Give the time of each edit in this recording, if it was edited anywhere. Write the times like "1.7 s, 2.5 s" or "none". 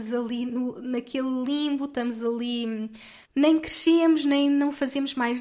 3.2 s